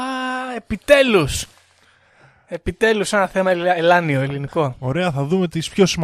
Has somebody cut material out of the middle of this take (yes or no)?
no